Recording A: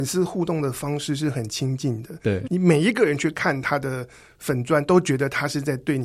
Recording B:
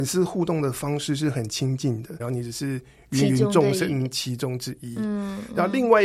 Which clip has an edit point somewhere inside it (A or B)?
B